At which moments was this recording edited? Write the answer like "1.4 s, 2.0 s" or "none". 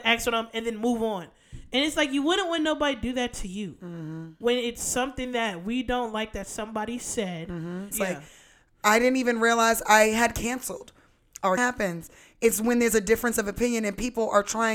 4.4 s, 7.9 s, 11.6 s